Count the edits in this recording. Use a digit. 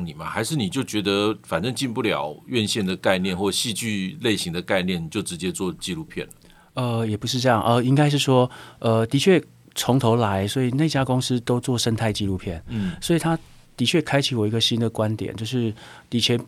0